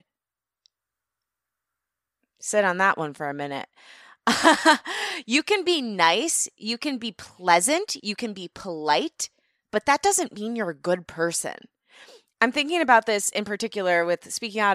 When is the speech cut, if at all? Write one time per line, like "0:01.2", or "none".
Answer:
none